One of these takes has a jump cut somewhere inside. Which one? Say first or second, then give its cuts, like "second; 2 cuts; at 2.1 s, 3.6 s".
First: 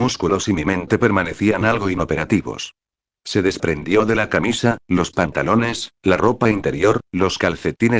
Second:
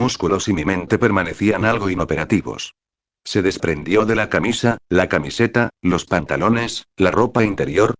first; 1 cut; at 4.8 s